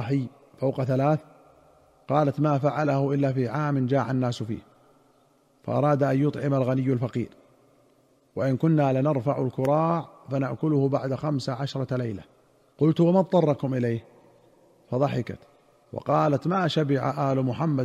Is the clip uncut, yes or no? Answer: yes